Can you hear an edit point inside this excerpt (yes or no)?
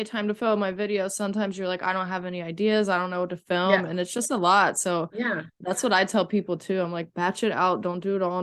no